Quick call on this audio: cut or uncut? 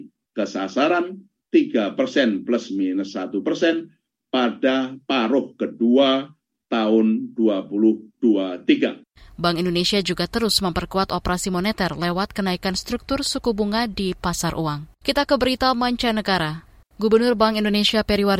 cut